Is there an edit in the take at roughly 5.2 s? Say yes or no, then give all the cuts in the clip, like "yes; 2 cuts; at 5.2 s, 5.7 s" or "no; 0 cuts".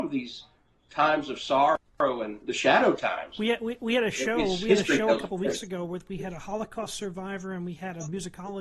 no; 1 cut; at 2.4 s